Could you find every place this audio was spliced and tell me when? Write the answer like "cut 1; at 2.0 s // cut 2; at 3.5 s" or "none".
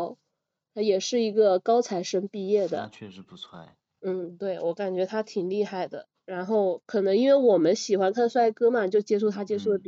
none